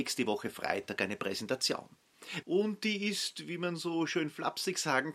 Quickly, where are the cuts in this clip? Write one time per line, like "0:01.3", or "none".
0:02.4